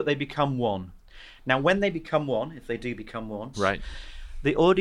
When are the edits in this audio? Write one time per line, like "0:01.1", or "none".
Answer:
0:03.5